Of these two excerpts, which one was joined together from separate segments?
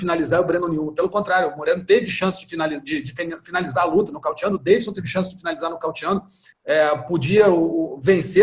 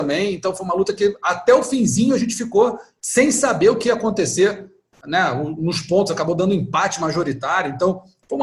first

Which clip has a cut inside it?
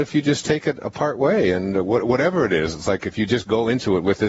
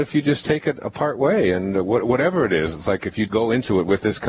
second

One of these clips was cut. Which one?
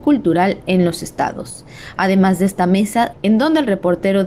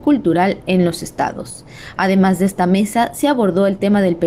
first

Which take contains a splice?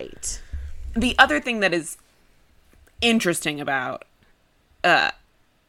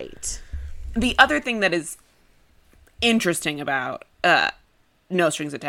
second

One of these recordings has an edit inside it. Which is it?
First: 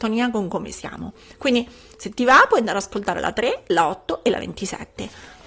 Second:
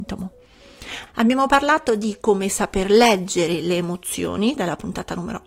second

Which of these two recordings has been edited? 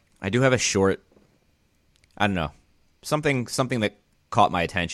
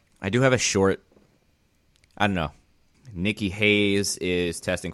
second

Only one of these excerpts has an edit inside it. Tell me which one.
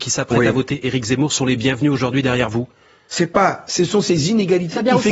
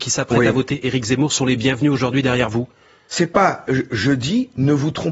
first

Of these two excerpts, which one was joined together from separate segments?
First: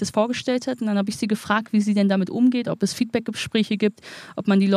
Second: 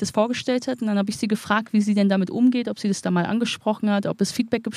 first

